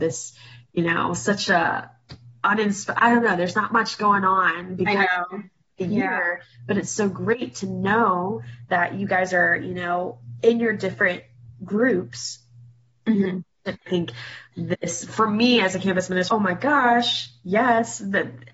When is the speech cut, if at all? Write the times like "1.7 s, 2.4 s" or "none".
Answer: 13.8 s, 16.3 s